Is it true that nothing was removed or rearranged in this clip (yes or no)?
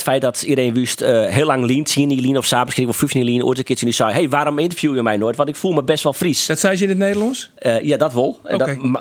yes